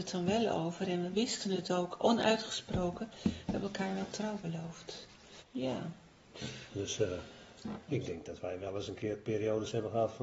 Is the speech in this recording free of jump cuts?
no; 3 cuts; at 5.4 s, 6.7 s, 7.9 s

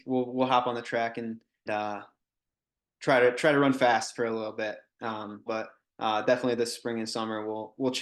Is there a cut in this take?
yes; 2 cuts; at 1.7 s, 5.5 s

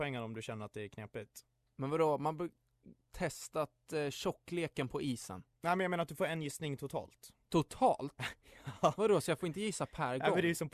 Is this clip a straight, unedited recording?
no; 2 cuts; at 3.0 s, 5.5 s

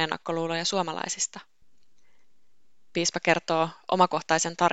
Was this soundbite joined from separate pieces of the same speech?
no; 0 cuts

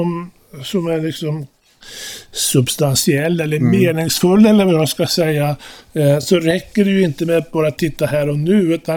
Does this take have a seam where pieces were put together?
no; 0 cuts

